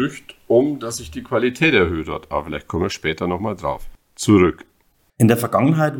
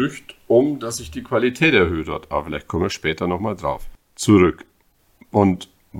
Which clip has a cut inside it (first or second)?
first